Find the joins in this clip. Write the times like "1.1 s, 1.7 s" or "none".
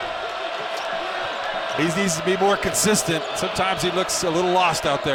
1.8 s